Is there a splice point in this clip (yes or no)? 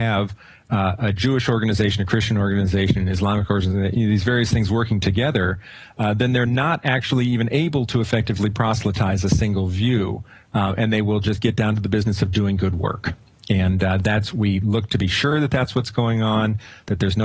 no